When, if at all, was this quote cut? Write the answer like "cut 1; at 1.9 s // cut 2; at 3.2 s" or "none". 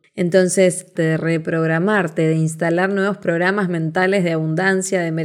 cut 1; at 1.0 s